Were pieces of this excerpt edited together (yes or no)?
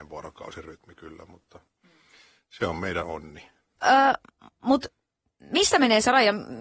yes